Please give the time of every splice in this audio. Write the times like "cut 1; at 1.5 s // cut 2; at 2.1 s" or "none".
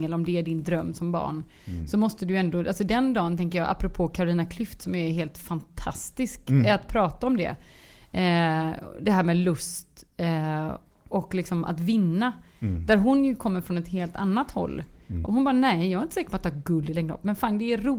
cut 1; at 15.2 s